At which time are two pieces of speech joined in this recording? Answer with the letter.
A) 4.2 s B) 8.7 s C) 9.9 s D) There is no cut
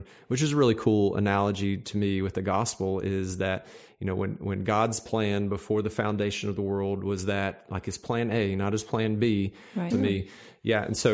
C